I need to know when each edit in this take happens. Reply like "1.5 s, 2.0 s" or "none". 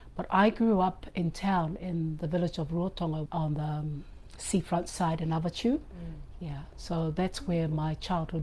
3.3 s

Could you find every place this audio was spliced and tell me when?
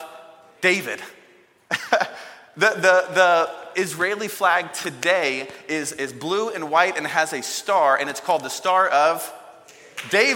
3.7 s

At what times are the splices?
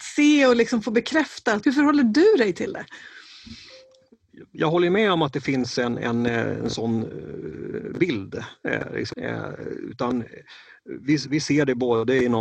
1.6 s, 9.1 s

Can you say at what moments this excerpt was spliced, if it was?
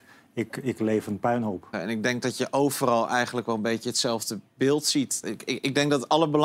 1.7 s, 5.2 s

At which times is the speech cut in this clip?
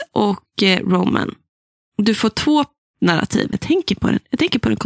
3.5 s

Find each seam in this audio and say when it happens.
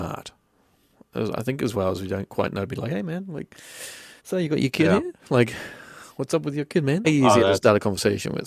4.2 s, 7.0 s

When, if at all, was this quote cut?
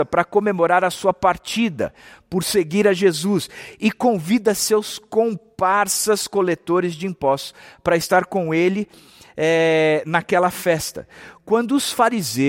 none

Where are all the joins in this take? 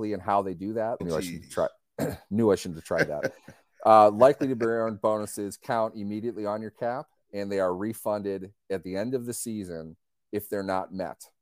1.0 s

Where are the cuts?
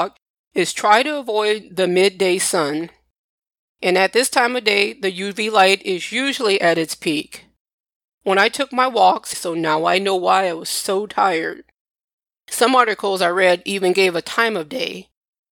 9.3 s

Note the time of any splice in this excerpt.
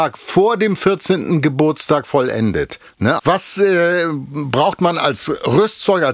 3.2 s

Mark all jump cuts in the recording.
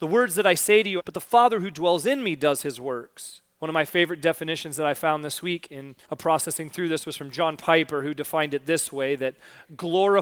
1.0 s, 3.6 s, 6.0 s

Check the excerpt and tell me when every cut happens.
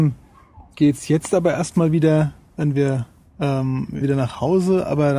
4.0 s

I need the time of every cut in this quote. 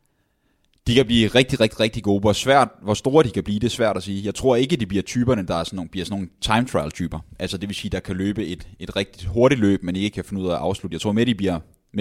none

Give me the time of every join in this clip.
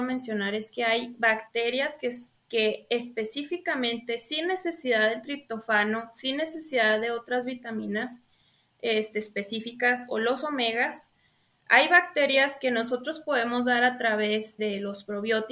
14.6 s

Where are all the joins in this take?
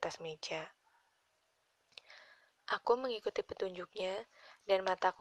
none

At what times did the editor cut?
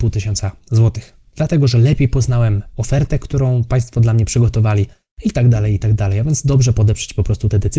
none

